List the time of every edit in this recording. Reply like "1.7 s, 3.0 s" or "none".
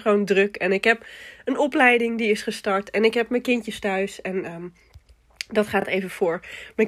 none